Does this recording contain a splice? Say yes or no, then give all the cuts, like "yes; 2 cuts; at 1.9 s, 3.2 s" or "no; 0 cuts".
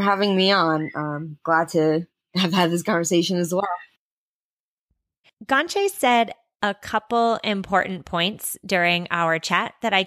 yes; 1 cut; at 5.2 s